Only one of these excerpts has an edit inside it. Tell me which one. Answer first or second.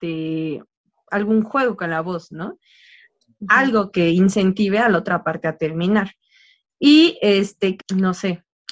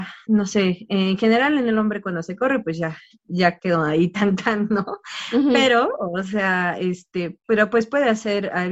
first